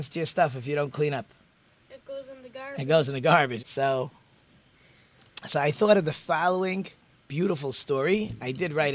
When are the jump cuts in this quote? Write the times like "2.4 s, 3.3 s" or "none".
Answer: 3.6 s

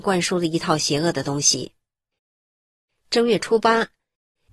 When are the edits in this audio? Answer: none

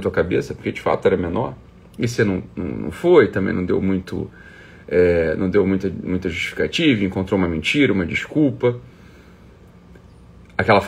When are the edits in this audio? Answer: none

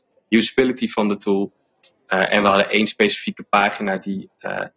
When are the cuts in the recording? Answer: none

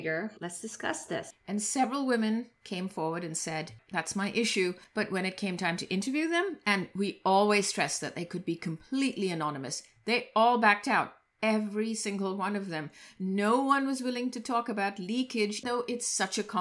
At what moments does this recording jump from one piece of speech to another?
3.8 s, 15.6 s

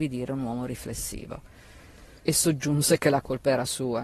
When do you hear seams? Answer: 2.2 s

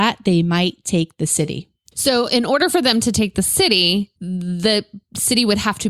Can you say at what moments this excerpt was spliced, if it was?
1.9 s, 4.2 s

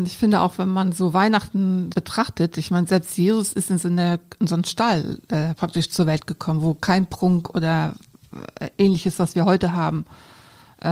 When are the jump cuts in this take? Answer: 1.9 s

